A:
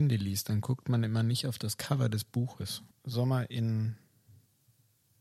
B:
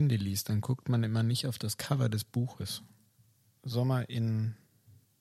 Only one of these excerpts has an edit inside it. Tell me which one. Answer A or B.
A